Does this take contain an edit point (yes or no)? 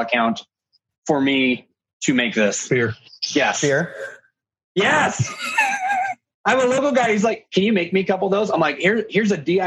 no